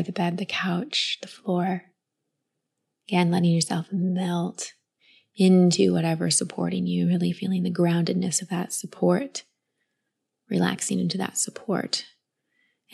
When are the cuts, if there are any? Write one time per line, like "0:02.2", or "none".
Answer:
none

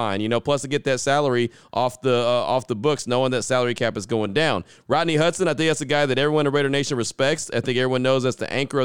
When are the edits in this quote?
none

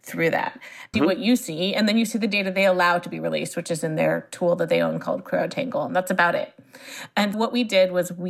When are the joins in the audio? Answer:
0:00.9
0:07.3

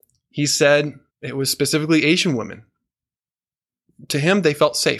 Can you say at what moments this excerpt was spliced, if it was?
0:01.1

